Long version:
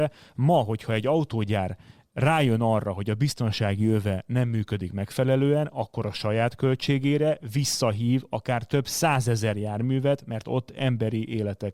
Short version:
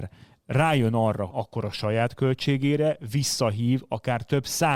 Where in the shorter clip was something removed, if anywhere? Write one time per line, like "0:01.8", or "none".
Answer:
0:01.3